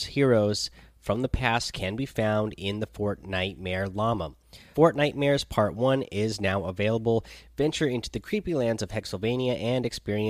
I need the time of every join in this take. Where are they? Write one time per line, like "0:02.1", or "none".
0:04.7